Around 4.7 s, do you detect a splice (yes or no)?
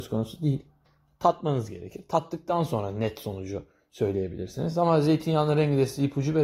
no